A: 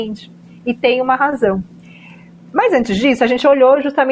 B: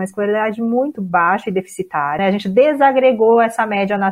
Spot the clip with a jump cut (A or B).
B